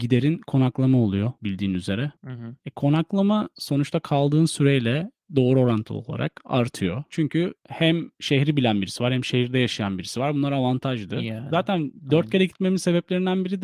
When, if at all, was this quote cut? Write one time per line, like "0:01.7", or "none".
0:07.1